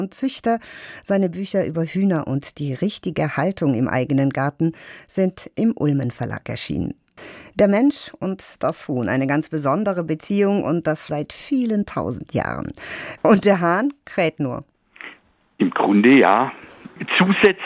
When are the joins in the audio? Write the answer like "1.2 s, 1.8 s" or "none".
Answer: 11.1 s, 13.2 s